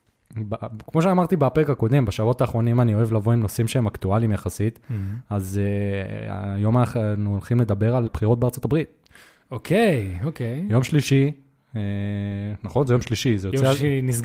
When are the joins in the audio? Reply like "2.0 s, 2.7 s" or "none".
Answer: 8.1 s